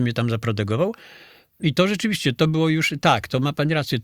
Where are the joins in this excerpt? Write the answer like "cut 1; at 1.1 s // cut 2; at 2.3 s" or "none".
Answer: cut 1; at 1.6 s